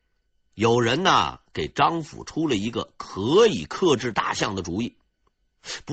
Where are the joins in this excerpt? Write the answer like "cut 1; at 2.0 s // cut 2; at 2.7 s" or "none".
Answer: none